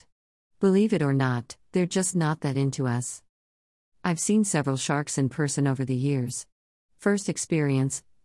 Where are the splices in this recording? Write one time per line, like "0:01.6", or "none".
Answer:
none